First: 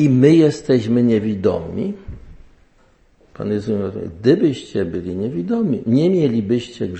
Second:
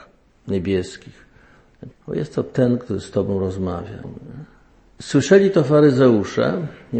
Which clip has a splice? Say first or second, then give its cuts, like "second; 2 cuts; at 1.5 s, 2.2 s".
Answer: second; 2 cuts; at 1.9 s, 4.0 s